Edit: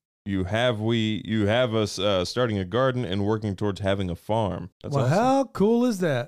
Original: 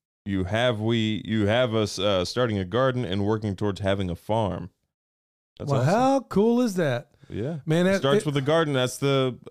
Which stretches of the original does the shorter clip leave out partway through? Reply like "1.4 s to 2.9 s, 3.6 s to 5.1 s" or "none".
4.7 s to 5.5 s